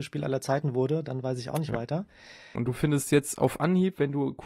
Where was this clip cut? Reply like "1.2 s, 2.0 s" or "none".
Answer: 2.5 s